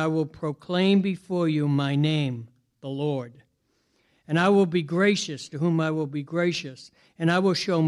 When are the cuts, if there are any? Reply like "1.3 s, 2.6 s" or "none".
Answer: none